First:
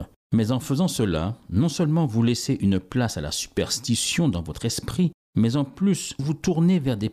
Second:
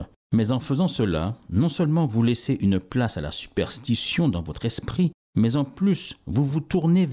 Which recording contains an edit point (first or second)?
first